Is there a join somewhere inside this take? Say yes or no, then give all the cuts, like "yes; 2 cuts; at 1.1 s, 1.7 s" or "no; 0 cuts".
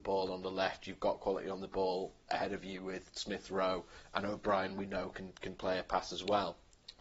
no; 0 cuts